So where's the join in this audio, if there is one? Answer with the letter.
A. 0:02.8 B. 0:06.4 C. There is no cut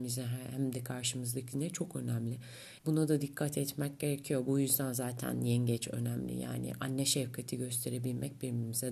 A